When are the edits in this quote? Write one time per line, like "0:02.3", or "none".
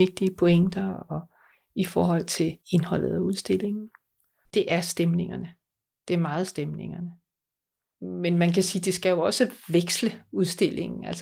0:02.6
0:04.4